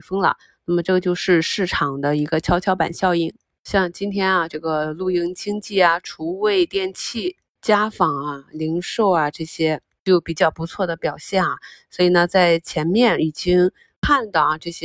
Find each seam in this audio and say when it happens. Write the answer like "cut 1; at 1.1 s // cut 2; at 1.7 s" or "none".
none

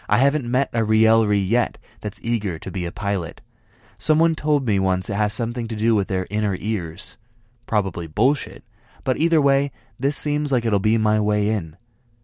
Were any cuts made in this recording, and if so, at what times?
none

